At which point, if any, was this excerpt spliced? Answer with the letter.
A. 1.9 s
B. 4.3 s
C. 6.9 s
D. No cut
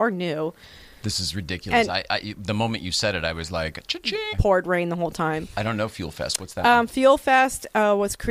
B